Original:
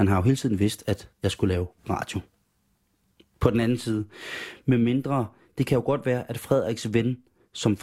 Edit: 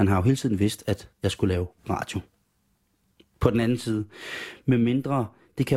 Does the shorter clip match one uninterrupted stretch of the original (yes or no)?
yes